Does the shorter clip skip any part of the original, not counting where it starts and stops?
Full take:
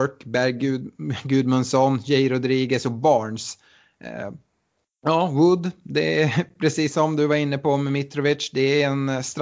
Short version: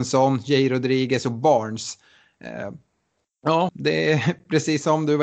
yes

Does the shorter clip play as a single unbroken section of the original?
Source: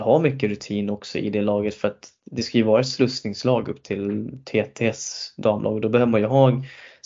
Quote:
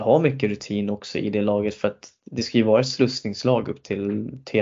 yes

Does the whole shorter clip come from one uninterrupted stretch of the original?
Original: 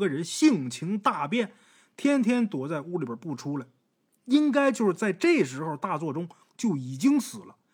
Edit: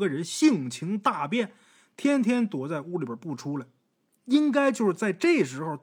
yes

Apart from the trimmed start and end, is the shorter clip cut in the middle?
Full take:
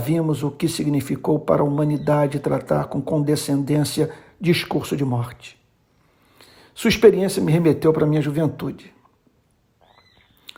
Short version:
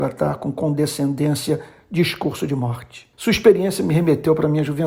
yes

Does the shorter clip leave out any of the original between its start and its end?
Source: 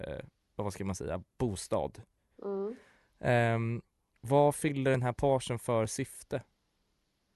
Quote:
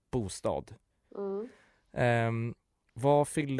no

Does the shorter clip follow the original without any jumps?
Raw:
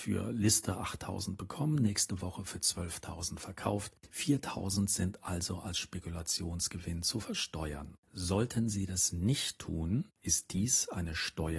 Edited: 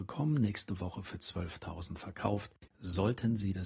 no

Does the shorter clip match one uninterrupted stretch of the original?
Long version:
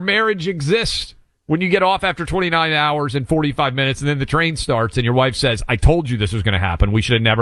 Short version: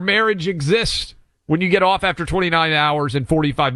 yes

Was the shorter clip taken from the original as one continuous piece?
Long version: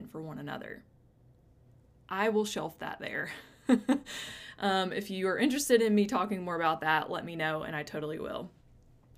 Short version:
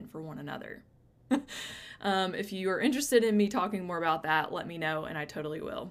no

